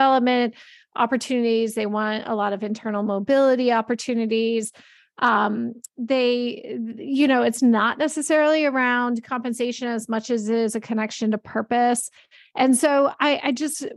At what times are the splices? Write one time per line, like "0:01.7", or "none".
none

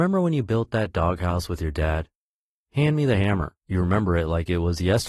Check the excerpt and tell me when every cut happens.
0:03.6

